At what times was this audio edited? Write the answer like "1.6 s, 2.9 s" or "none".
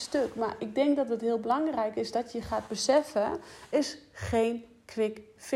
3.7 s